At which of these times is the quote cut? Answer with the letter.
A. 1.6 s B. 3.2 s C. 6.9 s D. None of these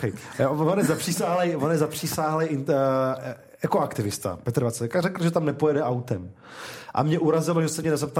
C